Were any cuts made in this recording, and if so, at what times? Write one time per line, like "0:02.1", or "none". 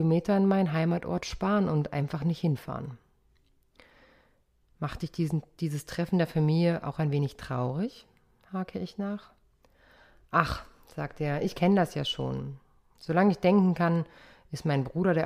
0:04.6